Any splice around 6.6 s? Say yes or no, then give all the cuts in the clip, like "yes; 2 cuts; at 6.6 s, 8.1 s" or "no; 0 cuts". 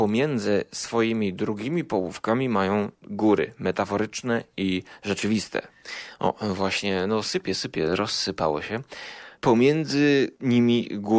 no; 1 cut; at 2.9 s